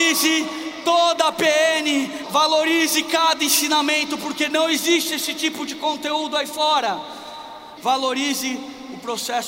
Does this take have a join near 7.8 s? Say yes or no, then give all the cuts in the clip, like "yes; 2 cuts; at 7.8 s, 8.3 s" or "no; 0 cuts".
yes; 2 cuts; at 2.2 s, 7.8 s